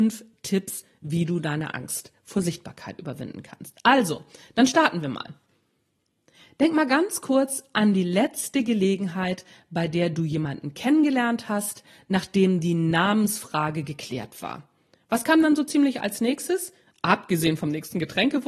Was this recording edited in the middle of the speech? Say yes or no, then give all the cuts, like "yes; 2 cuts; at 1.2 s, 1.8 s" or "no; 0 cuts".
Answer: no; 0 cuts